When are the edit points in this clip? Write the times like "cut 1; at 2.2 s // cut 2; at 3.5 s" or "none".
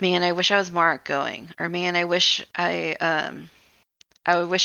none